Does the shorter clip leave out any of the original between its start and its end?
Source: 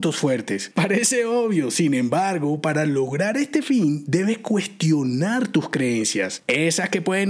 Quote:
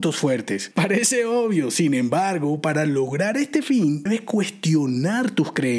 yes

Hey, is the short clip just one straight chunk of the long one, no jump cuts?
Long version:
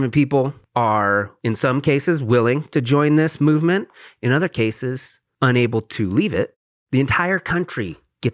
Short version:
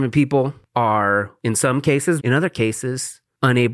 no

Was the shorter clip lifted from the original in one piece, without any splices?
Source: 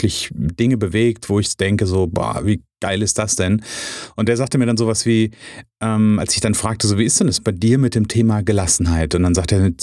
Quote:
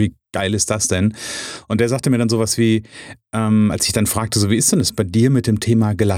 yes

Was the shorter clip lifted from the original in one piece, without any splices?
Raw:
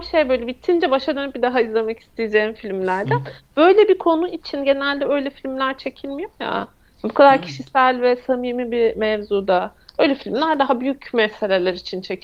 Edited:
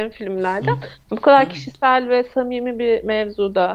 no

